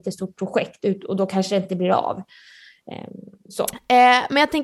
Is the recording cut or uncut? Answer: uncut